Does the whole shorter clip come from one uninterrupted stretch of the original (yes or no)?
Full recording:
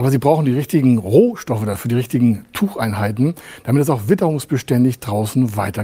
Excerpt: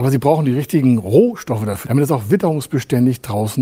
no